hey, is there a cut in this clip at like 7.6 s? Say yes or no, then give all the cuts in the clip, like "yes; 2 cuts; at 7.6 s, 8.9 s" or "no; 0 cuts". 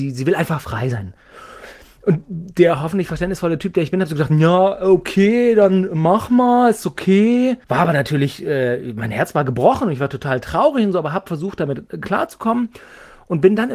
yes; 1 cut; at 7.6 s